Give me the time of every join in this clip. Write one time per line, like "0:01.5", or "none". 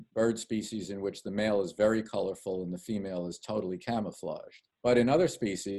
none